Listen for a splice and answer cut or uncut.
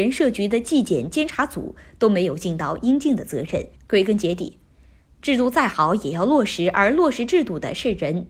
cut